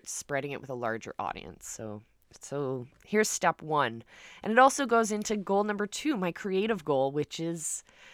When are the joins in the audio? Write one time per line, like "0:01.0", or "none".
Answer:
none